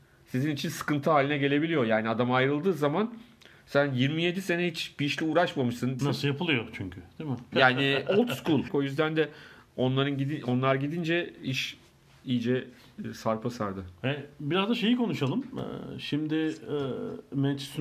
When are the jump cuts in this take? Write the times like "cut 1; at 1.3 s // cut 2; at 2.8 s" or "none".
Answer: cut 1; at 6.0 s // cut 2; at 7.5 s // cut 3; at 8.7 s